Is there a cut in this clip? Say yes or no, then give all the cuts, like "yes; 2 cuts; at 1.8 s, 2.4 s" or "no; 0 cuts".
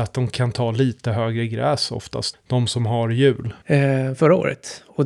yes; 2 cuts; at 2.3 s, 3.6 s